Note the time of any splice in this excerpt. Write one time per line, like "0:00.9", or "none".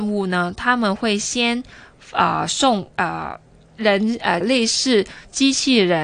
0:02.9
0:04.4